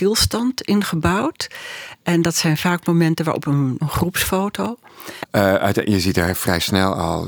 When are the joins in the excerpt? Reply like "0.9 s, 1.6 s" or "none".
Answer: 3.8 s, 5.2 s